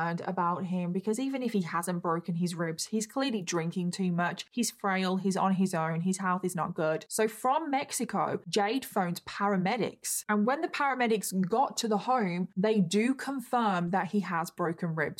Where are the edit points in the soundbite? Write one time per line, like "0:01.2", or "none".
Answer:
none